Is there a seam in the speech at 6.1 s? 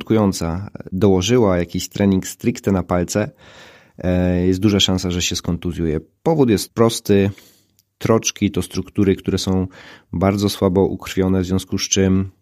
no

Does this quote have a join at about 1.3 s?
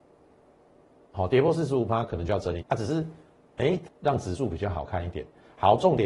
no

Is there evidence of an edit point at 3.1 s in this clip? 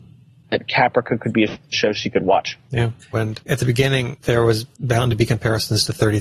yes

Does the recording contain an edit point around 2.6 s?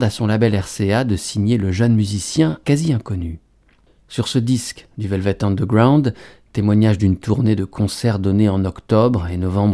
yes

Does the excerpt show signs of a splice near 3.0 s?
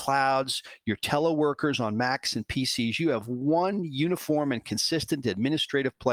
no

